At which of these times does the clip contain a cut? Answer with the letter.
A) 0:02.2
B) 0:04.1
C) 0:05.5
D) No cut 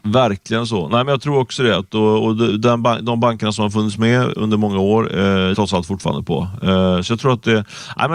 C